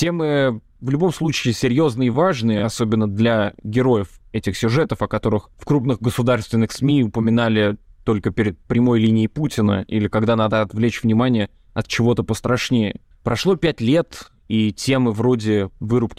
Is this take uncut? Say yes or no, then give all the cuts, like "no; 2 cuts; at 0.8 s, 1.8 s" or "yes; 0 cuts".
yes; 0 cuts